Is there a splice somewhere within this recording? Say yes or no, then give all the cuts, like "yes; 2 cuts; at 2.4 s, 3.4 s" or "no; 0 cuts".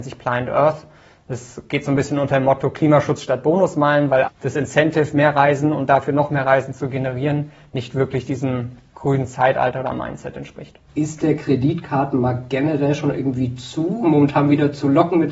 yes; 3 cuts; at 4.3 s, 10.9 s, 14.0 s